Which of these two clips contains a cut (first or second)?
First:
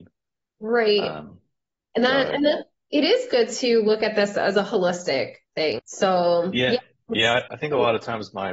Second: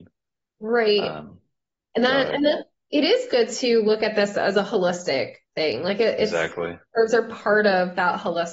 first